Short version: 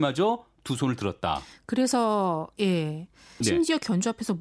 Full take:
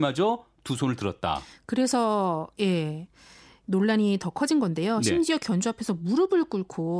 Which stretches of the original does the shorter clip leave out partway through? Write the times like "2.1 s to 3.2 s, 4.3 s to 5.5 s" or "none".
3.4 s to 5.0 s